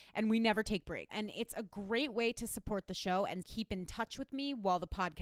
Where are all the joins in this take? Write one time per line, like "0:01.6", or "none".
0:01.1
0:03.4